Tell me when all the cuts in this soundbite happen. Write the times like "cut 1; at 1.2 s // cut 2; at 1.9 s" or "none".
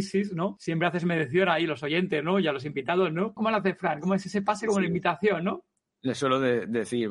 cut 1; at 3.4 s